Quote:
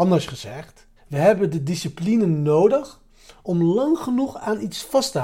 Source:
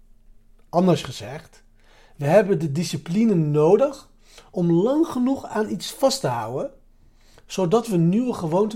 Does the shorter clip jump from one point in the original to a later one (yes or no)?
yes